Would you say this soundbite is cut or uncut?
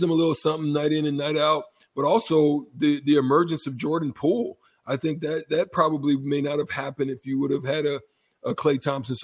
uncut